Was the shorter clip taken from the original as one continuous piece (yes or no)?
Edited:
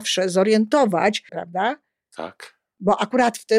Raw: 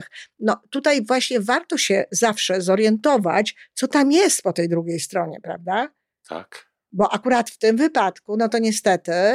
no